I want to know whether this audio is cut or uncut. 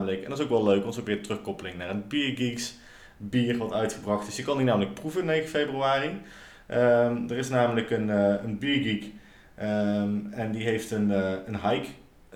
uncut